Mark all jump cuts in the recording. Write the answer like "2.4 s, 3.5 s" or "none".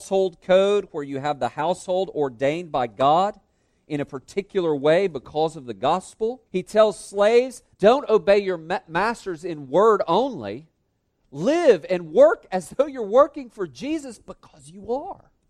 6.5 s, 7.7 s